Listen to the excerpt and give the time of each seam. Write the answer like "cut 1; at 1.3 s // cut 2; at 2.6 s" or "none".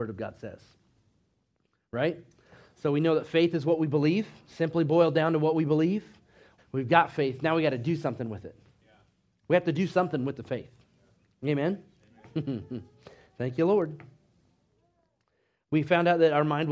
cut 1; at 6.6 s